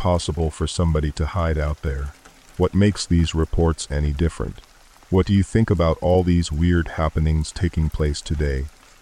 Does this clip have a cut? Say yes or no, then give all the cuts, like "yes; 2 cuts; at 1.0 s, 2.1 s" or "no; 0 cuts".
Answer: yes; 1 cut; at 2.5 s